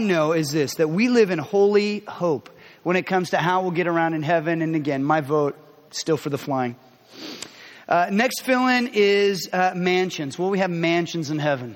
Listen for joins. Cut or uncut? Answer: uncut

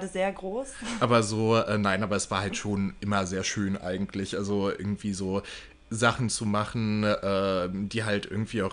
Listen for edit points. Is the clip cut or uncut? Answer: uncut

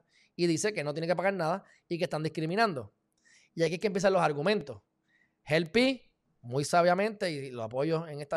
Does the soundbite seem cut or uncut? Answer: uncut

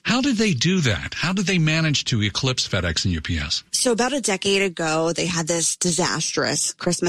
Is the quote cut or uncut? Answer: uncut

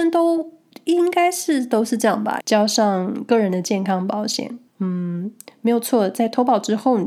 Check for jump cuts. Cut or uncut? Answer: cut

